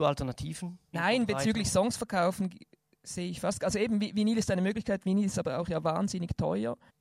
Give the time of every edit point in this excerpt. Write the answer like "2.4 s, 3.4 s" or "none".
0.9 s